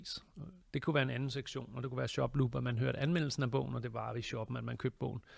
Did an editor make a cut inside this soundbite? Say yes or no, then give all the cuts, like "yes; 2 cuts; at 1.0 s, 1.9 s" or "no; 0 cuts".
no; 0 cuts